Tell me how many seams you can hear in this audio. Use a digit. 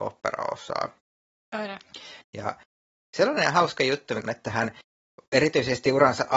2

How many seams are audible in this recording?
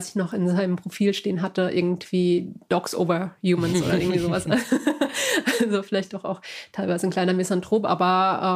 0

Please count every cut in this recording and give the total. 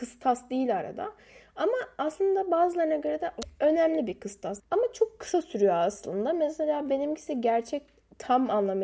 1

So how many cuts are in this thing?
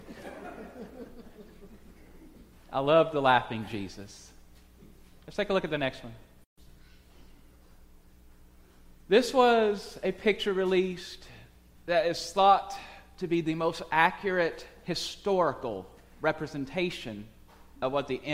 0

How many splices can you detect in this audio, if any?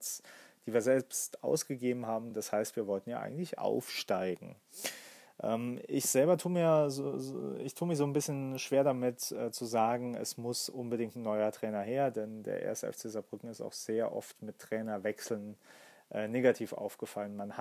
0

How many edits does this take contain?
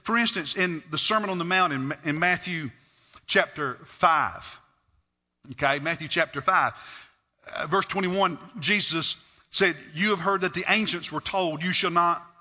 0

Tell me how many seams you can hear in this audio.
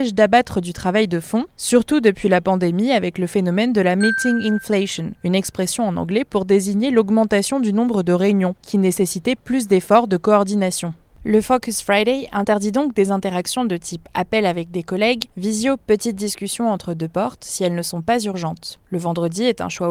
1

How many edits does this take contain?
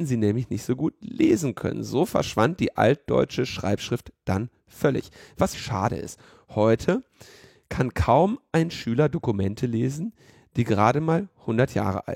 1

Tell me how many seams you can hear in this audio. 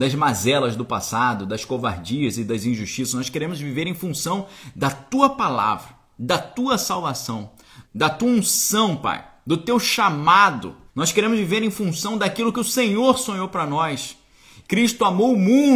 3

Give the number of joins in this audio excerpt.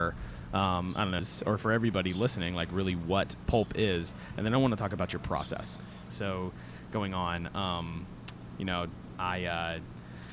2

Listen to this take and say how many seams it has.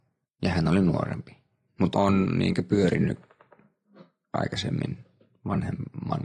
1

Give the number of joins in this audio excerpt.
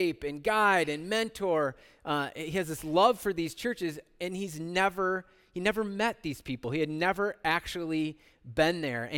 0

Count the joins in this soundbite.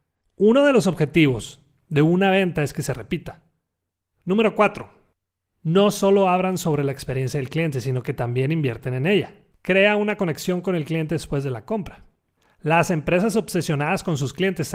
2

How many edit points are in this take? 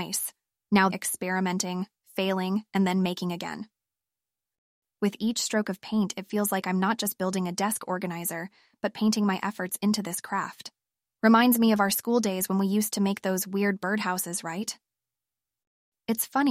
3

